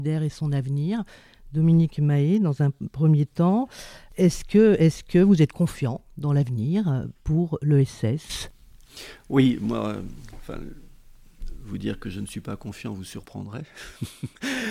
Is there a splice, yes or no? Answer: no